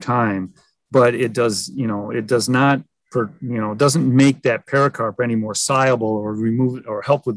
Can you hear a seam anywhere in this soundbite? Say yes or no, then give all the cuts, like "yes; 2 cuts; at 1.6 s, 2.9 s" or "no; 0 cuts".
no; 0 cuts